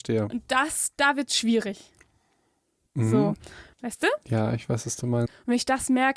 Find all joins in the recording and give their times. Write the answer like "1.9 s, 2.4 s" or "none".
3.7 s, 5.3 s